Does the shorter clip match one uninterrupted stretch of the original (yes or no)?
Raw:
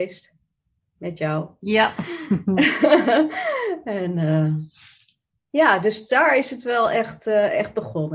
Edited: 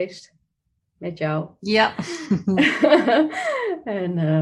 yes